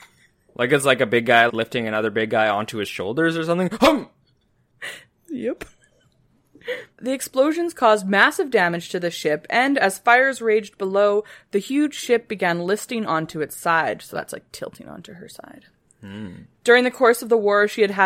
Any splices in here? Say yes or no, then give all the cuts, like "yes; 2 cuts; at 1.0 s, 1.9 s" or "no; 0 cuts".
yes; 2 cuts; at 1.5 s, 6.9 s